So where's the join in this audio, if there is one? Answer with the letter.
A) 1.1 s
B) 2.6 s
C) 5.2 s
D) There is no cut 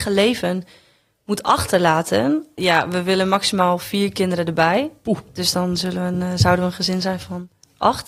B